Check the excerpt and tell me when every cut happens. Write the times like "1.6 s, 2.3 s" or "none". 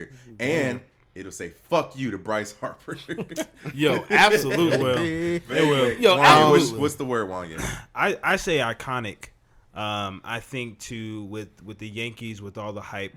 none